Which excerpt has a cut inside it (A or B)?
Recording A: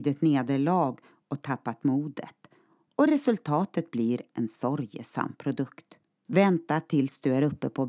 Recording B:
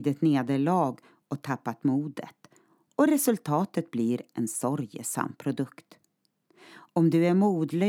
A